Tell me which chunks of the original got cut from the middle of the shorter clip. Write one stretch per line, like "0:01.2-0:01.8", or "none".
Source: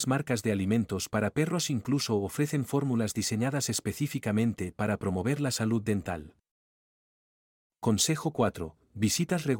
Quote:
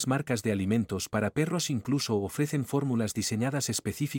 none